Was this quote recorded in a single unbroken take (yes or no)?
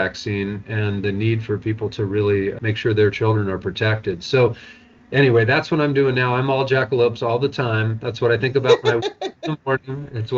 yes